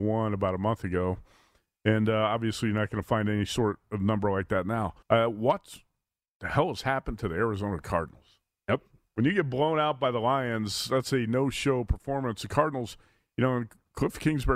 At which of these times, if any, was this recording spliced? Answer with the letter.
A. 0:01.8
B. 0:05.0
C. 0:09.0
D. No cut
B